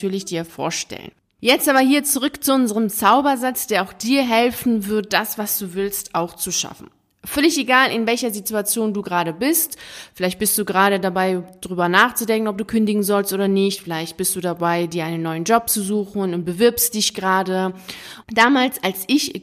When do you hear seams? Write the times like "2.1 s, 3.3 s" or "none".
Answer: 18.2 s